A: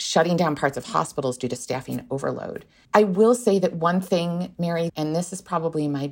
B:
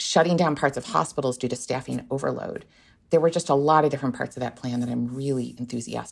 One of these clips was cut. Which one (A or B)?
A